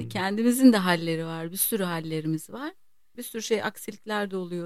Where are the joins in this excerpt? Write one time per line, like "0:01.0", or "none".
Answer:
0:03.1